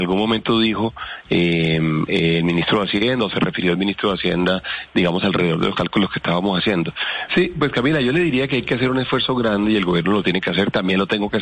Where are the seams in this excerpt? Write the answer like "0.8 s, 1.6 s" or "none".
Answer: 7.3 s